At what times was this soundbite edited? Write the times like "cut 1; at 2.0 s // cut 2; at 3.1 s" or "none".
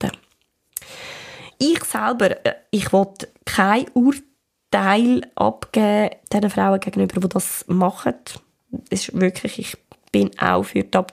cut 1; at 1.5 s // cut 2; at 6.2 s